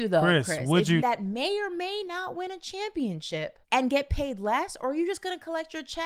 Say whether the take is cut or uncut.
cut